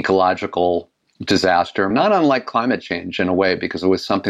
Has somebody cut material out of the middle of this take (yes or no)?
yes